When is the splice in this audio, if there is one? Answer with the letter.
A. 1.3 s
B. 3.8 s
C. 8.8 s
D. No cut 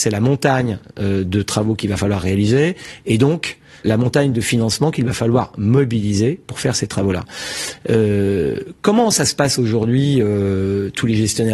B